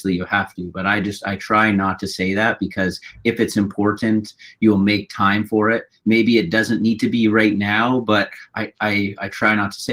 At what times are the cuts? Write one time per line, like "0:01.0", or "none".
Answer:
none